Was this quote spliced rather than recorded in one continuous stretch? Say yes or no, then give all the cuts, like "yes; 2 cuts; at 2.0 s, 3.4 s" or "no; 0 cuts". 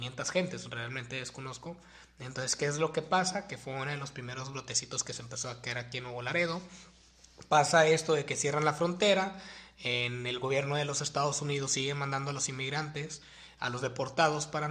no; 0 cuts